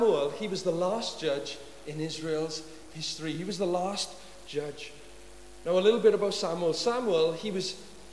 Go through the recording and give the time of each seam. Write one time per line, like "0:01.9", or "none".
none